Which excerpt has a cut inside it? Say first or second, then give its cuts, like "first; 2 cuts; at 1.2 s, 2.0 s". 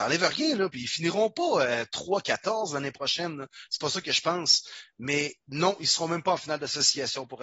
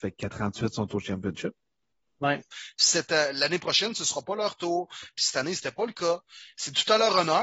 second; 2 cuts; at 2.5 s, 5.1 s